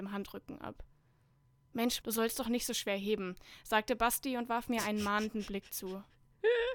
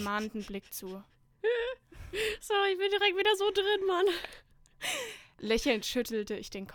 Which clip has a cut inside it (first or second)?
first